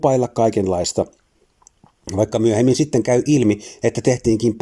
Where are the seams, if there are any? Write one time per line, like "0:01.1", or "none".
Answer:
none